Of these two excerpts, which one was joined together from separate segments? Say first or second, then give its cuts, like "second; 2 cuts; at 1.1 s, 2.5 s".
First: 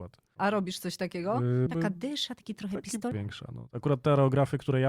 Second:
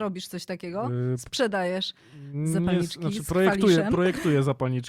first; 2 cuts; at 1.7 s, 3.1 s